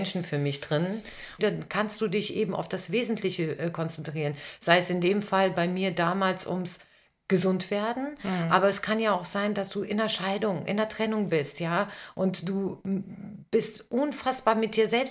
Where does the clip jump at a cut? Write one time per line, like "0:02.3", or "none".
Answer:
0:01.4